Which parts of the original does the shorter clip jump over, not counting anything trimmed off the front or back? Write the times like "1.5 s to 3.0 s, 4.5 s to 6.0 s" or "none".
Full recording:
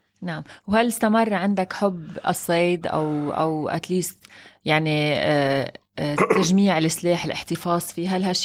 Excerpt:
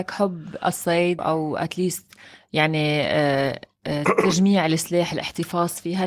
2.8 s to 3.3 s